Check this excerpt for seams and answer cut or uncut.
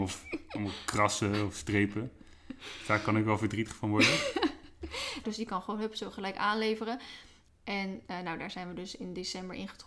cut